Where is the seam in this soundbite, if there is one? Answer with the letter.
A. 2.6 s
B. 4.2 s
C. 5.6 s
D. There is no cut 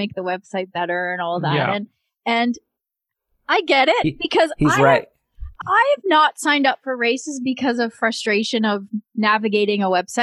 C